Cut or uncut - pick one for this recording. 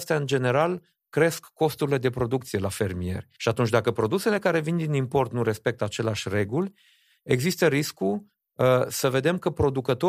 uncut